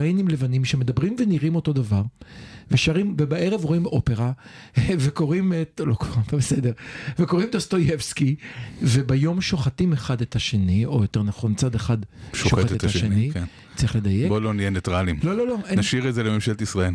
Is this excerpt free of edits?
yes; 0 cuts

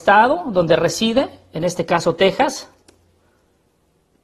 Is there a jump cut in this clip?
no; 0 cuts

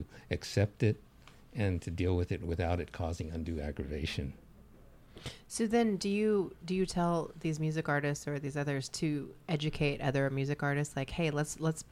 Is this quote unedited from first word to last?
yes; 0 cuts

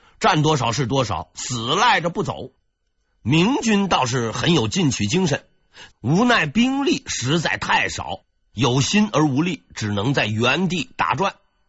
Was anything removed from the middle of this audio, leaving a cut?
yes; 1 cut; at 5.9 s

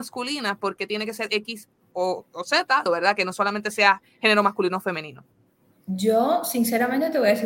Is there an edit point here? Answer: yes; 1 cut; at 2.9 s

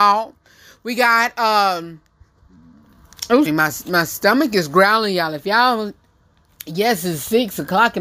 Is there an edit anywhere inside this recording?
yes; 1 cut; at 3.5 s

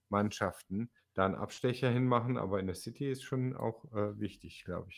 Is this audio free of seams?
no; 1 cut; at 1.0 s

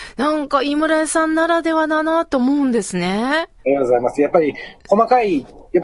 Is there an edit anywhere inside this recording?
yes; 1 cut; at 3.6 s

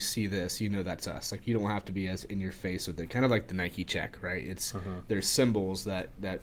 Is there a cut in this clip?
no; 0 cuts

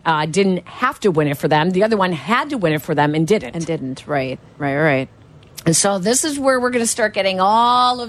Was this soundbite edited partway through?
no; 0 cuts

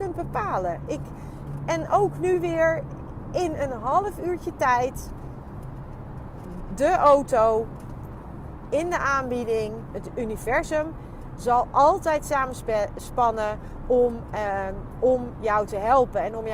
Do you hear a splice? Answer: yes; 1 cut; at 9.9 s

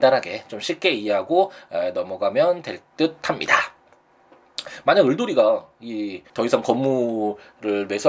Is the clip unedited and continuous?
no; 1 cut; at 6.3 s

